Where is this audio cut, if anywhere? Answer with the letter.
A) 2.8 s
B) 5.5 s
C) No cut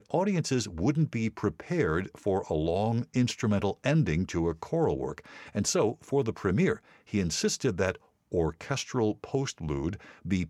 C